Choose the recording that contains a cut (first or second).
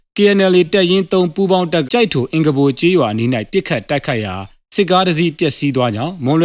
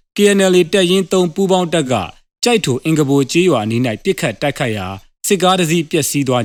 first